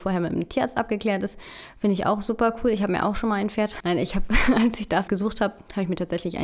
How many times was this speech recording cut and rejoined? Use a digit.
2